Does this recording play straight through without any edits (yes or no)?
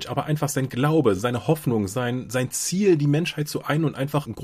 yes